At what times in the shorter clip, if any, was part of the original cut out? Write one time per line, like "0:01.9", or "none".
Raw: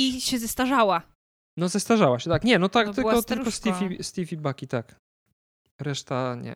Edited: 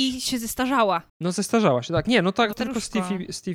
0:01.1
0:02.5